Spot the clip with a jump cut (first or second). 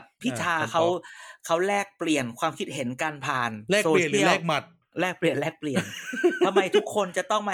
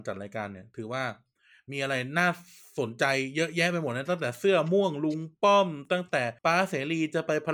second